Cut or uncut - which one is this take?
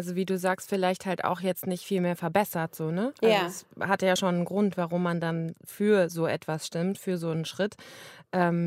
uncut